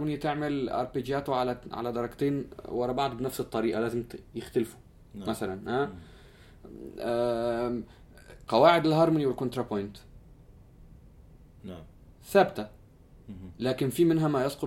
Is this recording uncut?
no; 1 cut; at 8.5 s

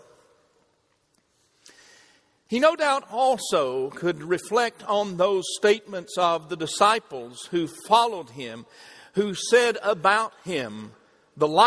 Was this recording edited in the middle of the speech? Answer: no; 0 cuts

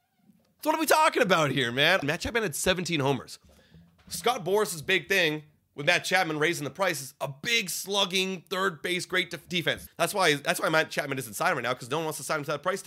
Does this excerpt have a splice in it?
yes; 2 cuts; at 2.0 s, 9.9 s

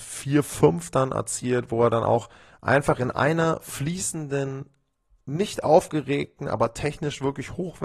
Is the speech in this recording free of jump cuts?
yes; 0 cuts

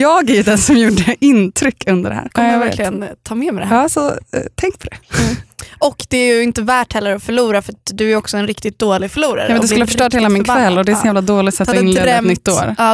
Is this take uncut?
no; 1 cut; at 2.3 s

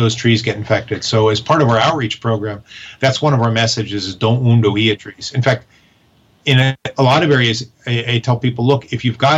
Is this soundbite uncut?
yes; 0 cuts

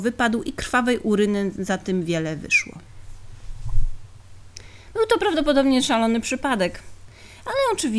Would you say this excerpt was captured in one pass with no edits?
yes; 0 cuts

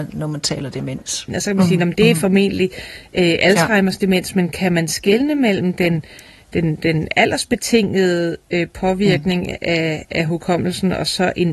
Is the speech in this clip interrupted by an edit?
yes; 1 cut; at 1.3 s

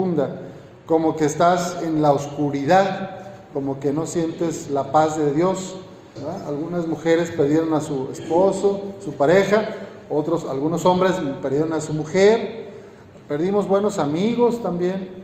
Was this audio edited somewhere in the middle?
yes; 1 cut; at 6.2 s

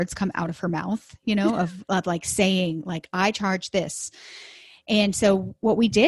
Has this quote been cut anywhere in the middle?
no; 0 cuts

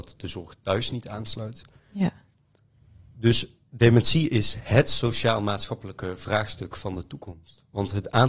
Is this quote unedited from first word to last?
yes; 0 cuts

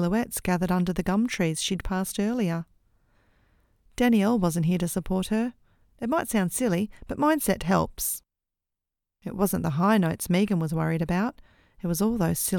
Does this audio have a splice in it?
yes; 1 cut; at 5.8 s

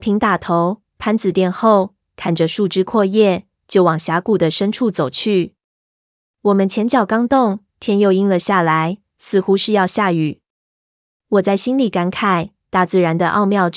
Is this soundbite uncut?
yes; 0 cuts

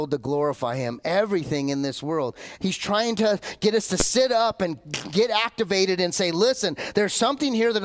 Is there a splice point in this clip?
yes; 1 cut; at 2.6 s

